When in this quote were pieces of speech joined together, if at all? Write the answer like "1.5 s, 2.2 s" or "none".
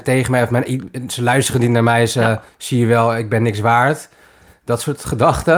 2.5 s